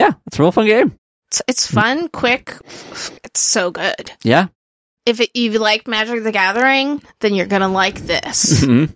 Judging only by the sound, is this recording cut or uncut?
cut